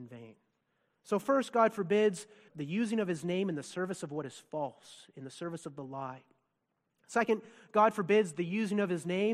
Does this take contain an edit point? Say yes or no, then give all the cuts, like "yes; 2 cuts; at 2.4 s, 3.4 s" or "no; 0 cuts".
yes; 1 cut; at 2.5 s